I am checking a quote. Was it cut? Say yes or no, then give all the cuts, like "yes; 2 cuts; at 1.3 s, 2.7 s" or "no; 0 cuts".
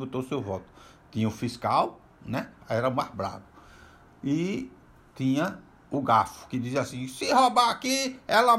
yes; 1 cut; at 2.6 s